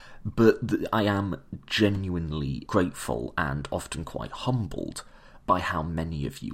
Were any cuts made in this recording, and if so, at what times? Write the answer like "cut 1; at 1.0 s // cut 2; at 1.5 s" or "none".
cut 1; at 2.7 s // cut 2; at 5.4 s